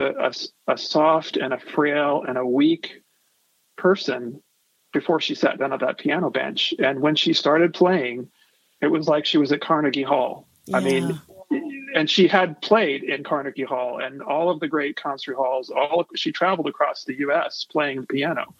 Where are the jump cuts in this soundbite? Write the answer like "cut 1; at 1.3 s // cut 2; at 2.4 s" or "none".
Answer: none